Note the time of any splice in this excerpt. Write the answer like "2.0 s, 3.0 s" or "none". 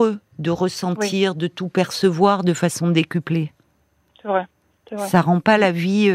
none